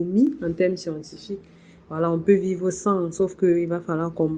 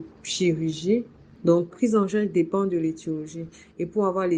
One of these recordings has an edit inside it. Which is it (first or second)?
second